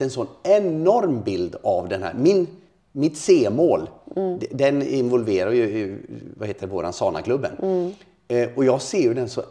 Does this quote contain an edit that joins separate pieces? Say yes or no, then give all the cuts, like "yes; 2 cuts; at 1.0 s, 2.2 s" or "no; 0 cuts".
no; 0 cuts